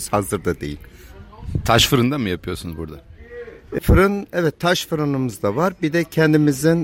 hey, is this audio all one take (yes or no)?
no